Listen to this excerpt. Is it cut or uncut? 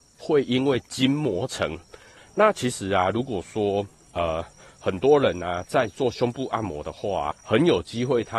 cut